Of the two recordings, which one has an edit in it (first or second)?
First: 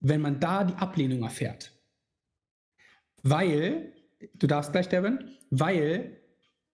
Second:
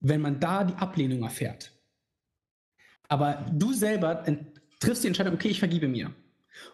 second